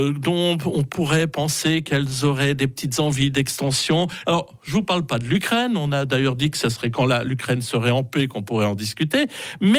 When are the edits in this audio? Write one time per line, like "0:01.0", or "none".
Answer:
0:04.2